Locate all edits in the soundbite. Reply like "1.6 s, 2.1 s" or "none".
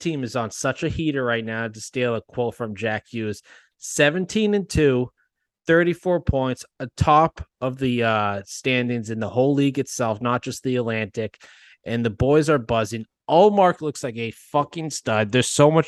none